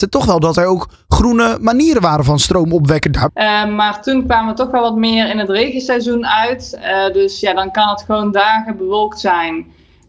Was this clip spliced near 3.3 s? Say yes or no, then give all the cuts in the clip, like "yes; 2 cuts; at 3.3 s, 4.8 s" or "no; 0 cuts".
yes; 1 cut; at 3.3 s